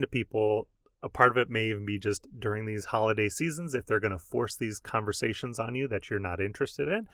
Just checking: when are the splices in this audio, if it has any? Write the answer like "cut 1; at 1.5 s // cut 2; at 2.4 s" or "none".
none

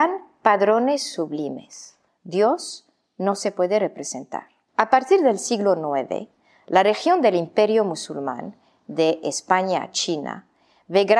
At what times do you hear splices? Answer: cut 1; at 2.1 s // cut 2; at 4.7 s

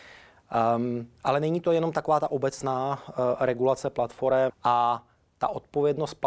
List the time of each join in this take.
cut 1; at 4.5 s

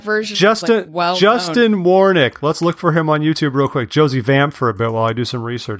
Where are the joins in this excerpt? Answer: none

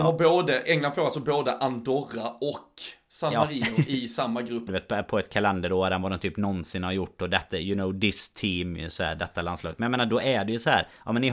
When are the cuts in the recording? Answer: cut 1; at 4.7 s

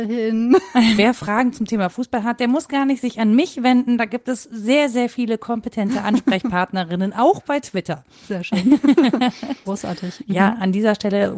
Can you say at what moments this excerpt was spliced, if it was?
cut 1; at 1.0 s // cut 2; at 9.6 s

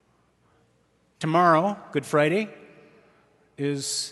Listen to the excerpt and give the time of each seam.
none

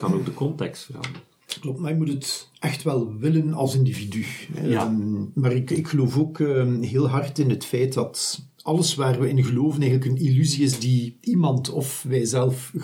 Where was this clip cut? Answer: none

